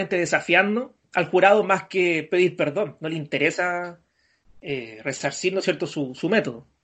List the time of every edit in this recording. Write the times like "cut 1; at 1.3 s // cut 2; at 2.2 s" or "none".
none